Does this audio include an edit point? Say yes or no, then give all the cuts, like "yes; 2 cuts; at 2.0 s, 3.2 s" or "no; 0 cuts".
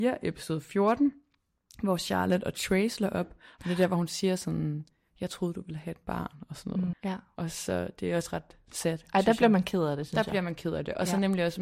yes; 1 cut; at 6.9 s